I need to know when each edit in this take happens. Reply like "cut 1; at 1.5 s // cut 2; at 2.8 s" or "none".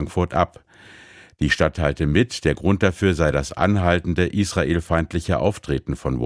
none